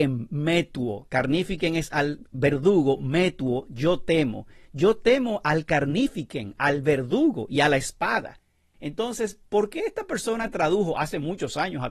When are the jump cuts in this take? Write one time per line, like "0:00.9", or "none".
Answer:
none